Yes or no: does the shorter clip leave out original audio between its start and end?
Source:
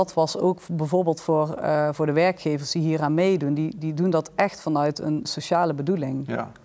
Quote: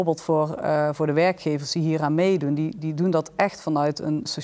no